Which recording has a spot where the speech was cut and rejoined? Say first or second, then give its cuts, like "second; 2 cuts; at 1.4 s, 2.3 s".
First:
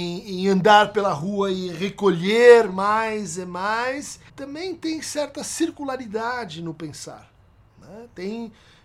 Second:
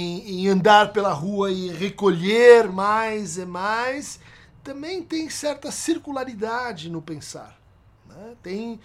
first; 1 cut; at 4.3 s